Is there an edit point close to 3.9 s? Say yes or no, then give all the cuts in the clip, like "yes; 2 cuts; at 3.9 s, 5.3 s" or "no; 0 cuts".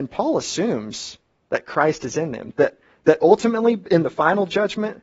no; 1 cut; at 2.5 s